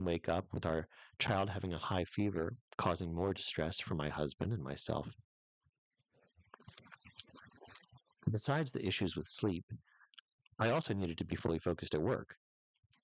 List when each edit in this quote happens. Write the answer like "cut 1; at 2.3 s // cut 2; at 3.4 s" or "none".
none